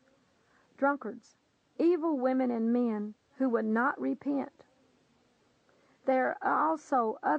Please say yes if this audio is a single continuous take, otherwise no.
yes